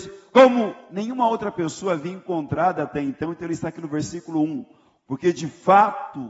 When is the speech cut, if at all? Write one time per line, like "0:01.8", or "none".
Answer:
0:05.1